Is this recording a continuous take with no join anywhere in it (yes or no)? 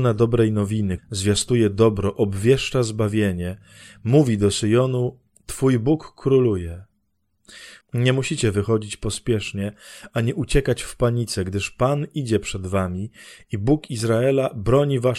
no